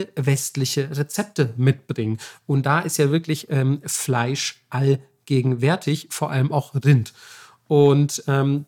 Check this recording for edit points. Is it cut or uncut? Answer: uncut